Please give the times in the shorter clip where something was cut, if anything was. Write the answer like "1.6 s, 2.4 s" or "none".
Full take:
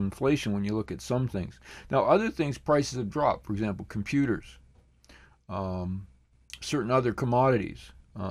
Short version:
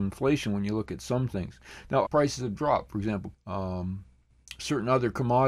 2.1 s, 3.3 s

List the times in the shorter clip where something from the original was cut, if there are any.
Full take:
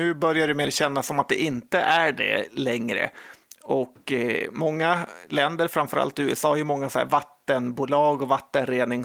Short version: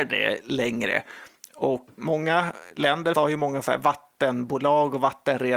2.0 s, 3.1 s

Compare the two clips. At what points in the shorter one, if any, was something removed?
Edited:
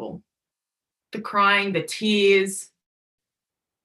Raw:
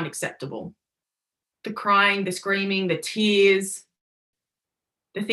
1.7 s

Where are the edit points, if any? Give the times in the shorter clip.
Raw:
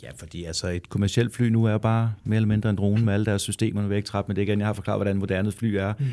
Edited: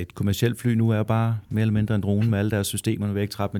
none

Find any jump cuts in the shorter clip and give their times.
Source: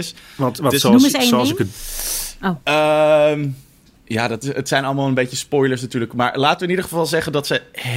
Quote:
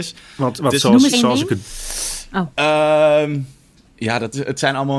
1.1 s

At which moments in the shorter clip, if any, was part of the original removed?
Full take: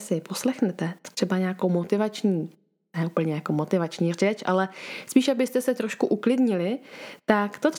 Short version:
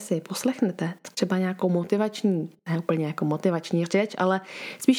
2.6 s

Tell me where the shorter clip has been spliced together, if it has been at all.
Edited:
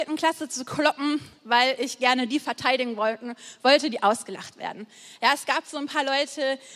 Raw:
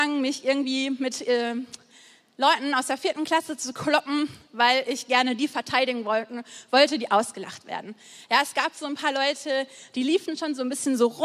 none

